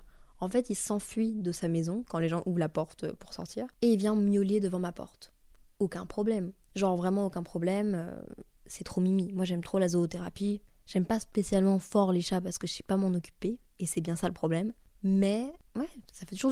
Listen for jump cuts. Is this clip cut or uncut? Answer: uncut